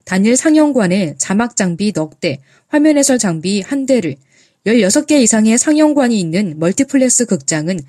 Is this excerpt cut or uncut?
uncut